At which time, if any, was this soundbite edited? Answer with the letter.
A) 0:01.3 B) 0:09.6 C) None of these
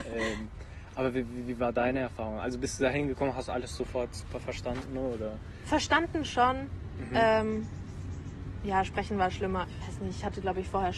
B